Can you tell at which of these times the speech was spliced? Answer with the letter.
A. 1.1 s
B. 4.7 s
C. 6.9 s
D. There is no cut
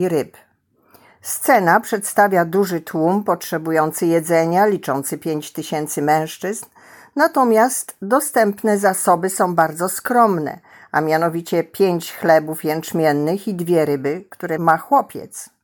D